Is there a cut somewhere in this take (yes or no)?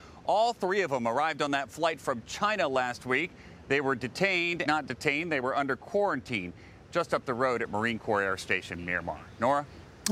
yes